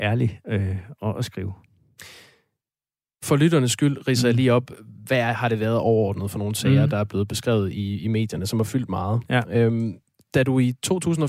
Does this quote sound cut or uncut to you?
uncut